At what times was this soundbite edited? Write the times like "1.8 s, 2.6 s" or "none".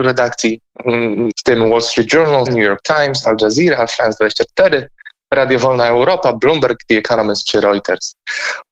1.3 s, 2.5 s